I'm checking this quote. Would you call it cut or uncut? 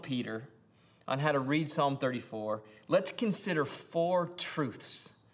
uncut